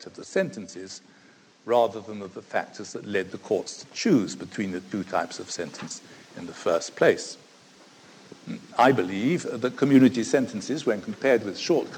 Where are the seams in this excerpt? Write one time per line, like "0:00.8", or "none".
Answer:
none